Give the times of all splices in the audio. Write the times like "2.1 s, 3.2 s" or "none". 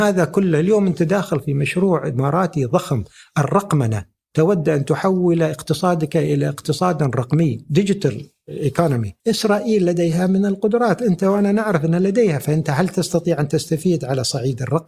9.2 s